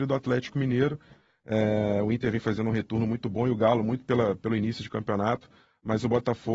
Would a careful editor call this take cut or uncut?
uncut